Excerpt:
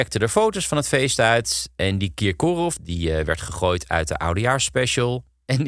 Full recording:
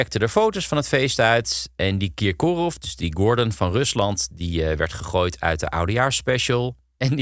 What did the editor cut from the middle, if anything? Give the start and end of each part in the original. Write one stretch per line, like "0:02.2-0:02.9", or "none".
0:02.8-0:04.3